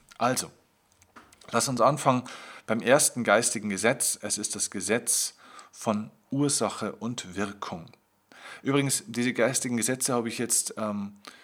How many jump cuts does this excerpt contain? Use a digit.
0